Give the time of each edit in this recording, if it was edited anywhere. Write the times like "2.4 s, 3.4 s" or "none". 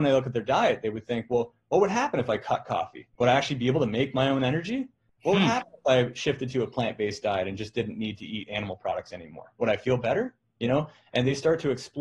3.1 s